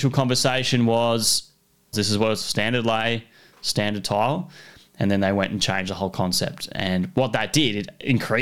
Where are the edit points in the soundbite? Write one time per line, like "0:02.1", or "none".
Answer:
0:01.9